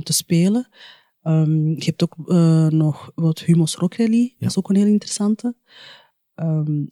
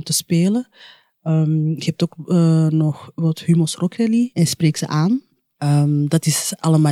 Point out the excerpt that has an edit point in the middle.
second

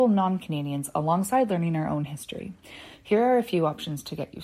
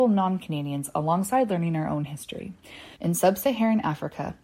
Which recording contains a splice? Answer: second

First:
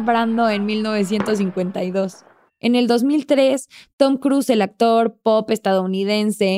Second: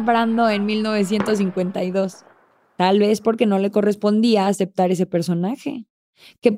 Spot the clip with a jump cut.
first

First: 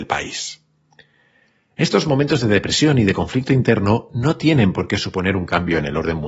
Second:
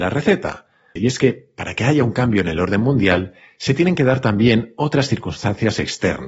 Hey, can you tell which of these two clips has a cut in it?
second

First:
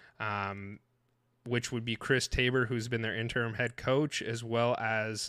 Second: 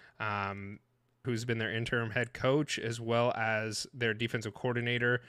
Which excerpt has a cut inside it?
second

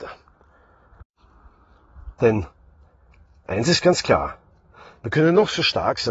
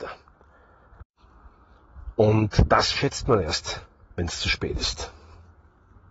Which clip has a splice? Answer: first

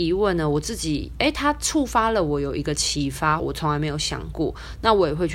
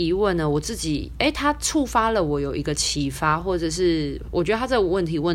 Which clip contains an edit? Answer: first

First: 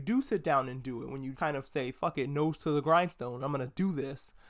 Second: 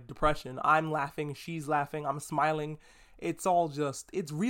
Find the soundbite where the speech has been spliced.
first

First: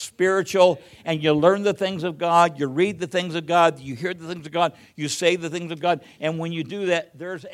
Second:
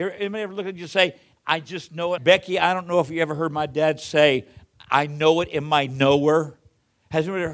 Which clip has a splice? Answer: second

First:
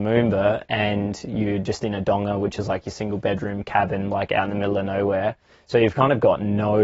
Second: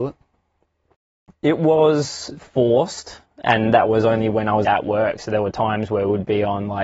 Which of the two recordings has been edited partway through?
second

